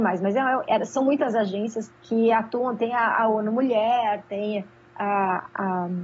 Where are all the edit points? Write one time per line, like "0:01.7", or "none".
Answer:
0:01.9